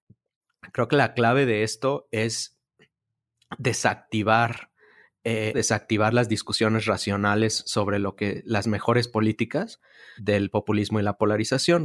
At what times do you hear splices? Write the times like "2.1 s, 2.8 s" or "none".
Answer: 5.5 s, 10.2 s